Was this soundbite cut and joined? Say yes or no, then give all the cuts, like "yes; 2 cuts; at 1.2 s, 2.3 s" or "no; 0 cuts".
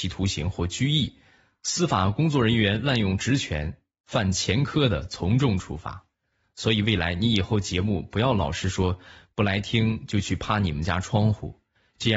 no; 0 cuts